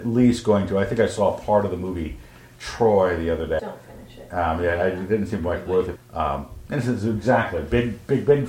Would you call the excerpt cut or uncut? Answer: cut